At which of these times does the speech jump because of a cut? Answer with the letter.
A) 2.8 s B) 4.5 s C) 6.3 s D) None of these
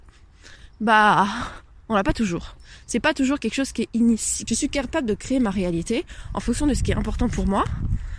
B